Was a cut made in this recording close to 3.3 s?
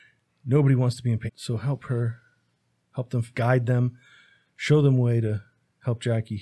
yes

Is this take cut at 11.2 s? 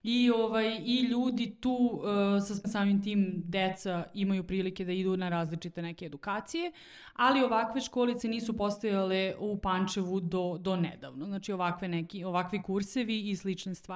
no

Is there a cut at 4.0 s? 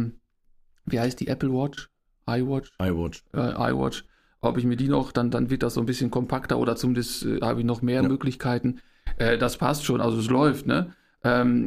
no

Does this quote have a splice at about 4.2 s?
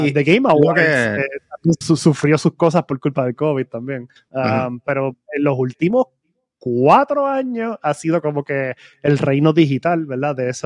yes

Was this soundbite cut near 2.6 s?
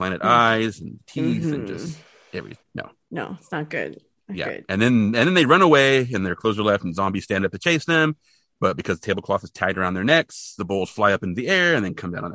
yes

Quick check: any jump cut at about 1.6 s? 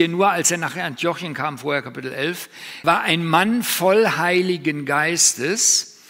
no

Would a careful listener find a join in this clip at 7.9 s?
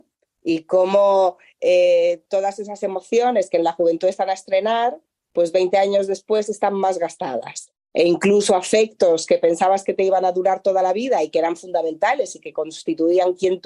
no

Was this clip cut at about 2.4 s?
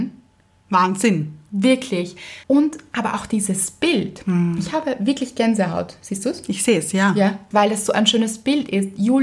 yes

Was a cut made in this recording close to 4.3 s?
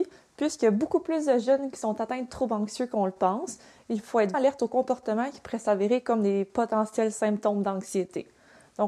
yes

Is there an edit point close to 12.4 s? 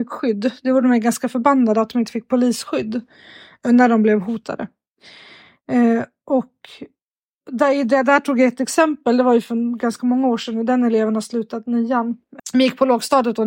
yes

